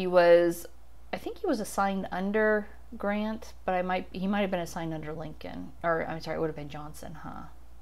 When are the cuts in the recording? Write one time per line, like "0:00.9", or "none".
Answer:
none